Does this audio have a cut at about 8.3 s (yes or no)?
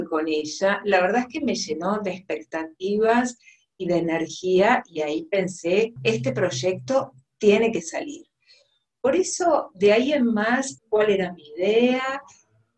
no